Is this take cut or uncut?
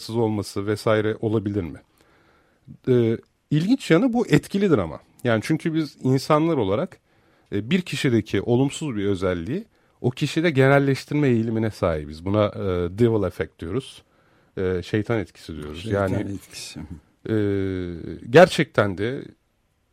uncut